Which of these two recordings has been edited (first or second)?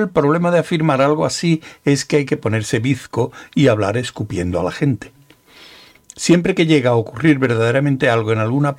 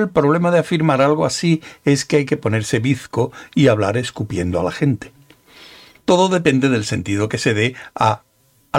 second